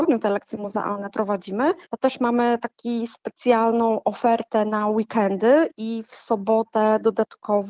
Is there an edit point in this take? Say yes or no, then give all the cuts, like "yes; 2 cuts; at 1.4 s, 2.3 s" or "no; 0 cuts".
yes; 1 cut; at 1.9 s